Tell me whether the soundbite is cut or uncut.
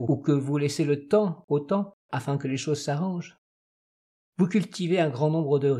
uncut